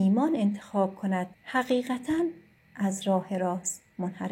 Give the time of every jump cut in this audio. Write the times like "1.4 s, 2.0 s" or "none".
1.3 s